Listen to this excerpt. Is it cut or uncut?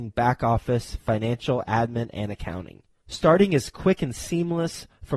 uncut